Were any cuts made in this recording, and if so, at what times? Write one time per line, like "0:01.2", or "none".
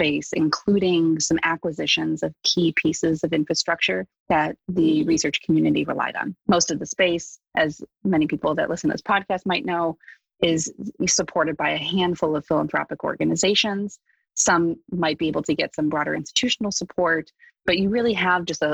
0:06.4